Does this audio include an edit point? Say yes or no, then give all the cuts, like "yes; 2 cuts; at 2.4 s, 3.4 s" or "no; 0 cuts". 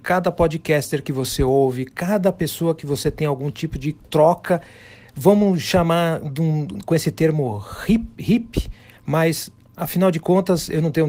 no; 0 cuts